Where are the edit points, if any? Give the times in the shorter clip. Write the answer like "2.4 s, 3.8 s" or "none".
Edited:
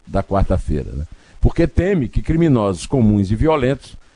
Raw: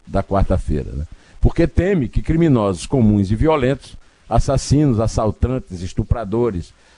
none